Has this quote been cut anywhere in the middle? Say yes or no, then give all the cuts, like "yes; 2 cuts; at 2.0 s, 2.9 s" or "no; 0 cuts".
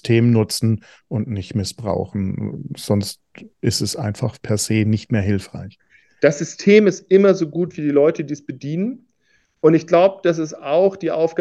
no; 0 cuts